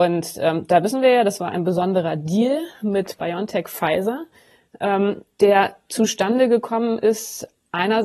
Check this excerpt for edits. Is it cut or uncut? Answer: uncut